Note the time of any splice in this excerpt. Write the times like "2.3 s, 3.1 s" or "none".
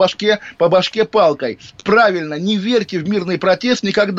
none

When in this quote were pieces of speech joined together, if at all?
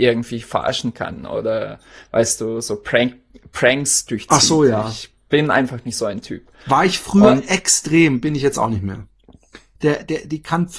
9.8 s

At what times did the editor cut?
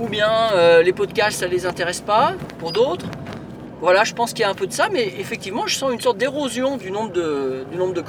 none

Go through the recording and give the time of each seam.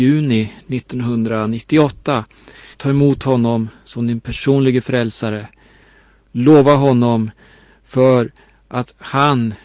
2.7 s

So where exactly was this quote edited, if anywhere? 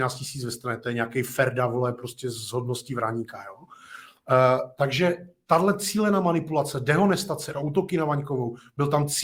7.5 s

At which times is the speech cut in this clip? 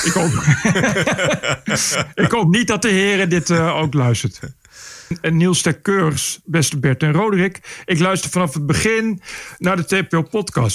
none

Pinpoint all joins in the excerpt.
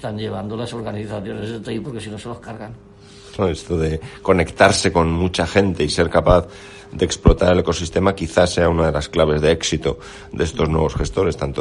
3.4 s

